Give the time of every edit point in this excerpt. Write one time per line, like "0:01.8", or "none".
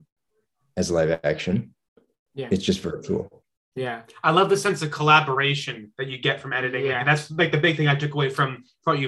none